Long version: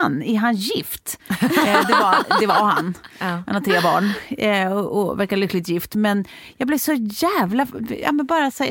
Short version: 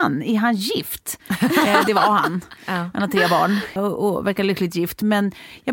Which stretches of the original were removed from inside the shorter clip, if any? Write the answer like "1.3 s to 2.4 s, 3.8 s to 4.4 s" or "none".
1.9 s to 2.4 s, 4.3 s to 4.7 s

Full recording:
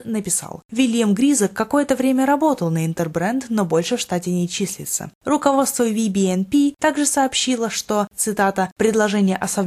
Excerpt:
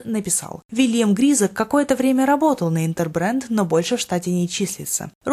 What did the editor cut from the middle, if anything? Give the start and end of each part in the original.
none

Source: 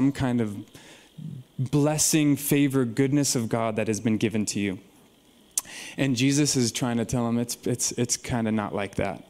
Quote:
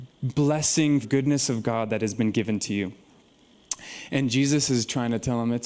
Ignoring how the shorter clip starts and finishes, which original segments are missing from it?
2.4 s to 2.9 s

